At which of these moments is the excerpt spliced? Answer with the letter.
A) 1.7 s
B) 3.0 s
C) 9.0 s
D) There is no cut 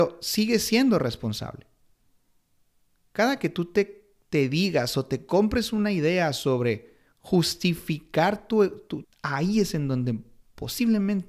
C